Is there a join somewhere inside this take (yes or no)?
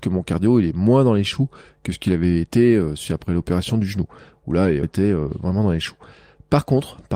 yes